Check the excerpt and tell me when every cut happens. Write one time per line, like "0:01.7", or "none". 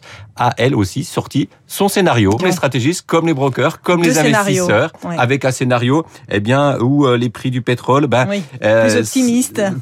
0:02.4